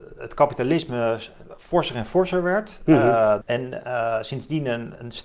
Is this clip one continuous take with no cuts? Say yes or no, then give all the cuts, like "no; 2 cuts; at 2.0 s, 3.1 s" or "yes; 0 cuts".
no; 1 cut; at 3.4 s